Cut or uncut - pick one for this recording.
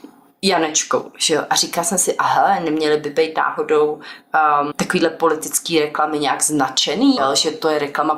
cut